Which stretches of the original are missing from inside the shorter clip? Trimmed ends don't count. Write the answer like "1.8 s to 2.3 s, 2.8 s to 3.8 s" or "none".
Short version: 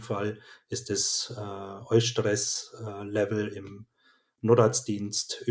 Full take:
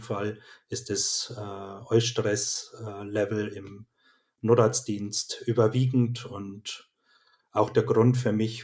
none